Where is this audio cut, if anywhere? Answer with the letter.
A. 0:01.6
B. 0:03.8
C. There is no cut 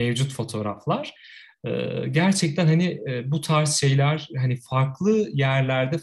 C